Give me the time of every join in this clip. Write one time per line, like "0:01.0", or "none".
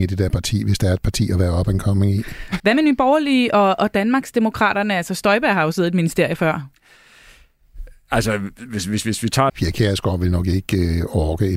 0:02.6
0:09.5